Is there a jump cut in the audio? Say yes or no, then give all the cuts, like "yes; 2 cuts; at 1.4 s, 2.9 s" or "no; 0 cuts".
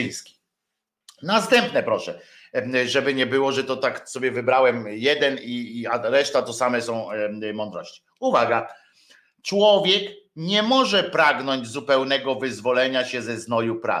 no; 0 cuts